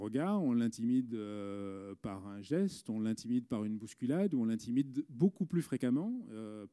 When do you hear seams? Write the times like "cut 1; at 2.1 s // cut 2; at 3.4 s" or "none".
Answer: none